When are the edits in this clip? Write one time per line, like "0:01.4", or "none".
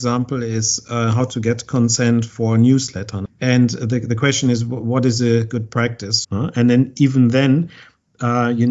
0:03.2
0:06.2